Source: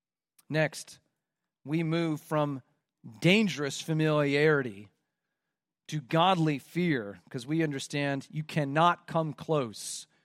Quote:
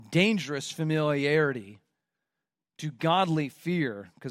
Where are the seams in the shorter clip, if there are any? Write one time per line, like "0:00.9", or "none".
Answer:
none